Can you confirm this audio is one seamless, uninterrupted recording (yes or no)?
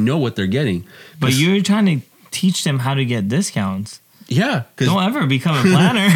yes